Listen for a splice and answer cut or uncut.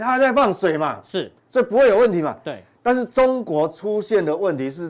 cut